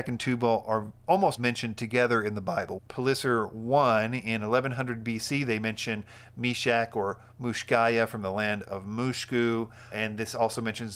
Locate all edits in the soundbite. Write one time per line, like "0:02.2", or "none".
0:01.4
0:02.8
0:09.9